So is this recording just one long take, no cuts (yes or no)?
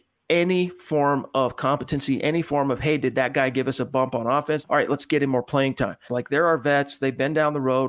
no